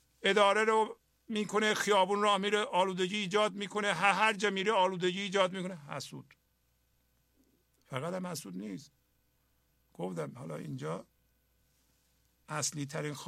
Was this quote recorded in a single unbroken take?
yes; 0 cuts

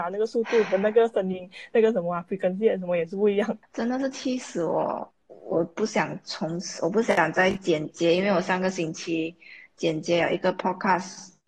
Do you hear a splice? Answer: yes; 1 cut; at 5.3 s

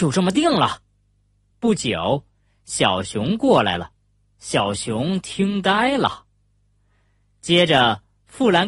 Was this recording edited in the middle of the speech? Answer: yes; 2 cuts; at 1.5 s, 4.3 s

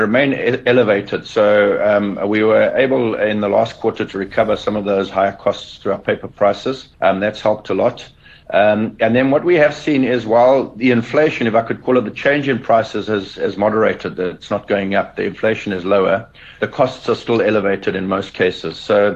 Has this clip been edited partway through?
yes; 1 cut; at 6.9 s

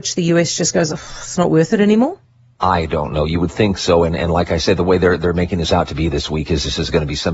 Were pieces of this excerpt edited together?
no; 0 cuts

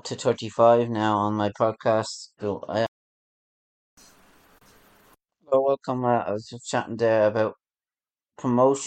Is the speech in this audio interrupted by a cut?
yes; 1 cut; at 2.4 s

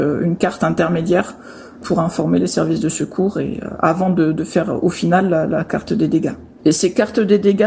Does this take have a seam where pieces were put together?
no; 0 cuts

